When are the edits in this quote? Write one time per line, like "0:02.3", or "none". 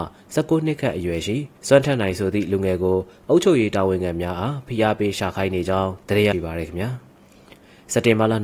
0:01.6
0:06.3